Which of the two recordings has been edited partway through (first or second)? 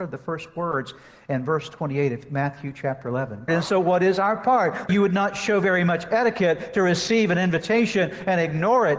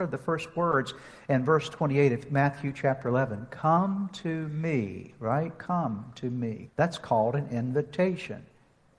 first